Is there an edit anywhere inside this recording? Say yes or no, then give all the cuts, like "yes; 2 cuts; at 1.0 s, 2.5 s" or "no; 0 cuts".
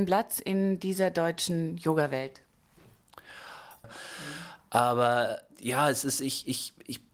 yes; 1 cut; at 3.8 s